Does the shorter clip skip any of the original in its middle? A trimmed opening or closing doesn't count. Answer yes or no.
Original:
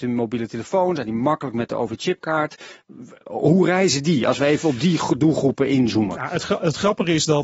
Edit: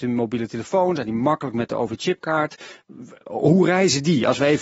no